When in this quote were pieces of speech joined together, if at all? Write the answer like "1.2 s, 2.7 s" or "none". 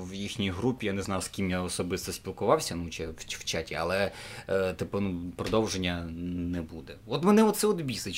none